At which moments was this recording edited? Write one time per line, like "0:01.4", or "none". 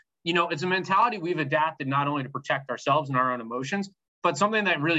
none